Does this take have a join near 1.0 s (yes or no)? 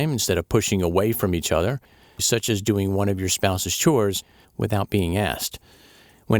no